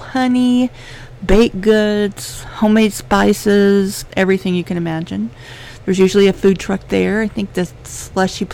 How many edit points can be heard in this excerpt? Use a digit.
1